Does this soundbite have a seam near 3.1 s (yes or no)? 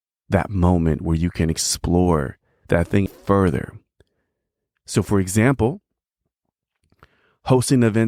yes